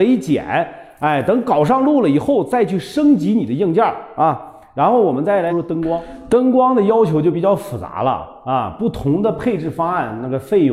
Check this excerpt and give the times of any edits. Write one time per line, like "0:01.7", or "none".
0:05.5